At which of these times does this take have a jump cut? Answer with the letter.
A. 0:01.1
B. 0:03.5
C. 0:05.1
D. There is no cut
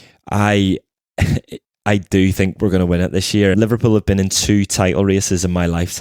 B